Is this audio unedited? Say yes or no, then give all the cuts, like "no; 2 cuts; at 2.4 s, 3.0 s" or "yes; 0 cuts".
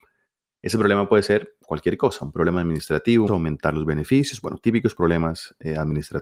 no; 1 cut; at 3.3 s